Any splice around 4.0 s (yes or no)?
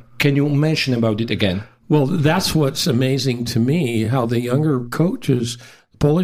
no